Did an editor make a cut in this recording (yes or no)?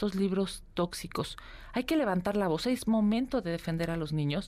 no